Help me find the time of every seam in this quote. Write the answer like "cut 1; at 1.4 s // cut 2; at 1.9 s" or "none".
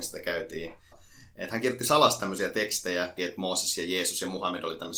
cut 1; at 0.9 s // cut 2; at 3.2 s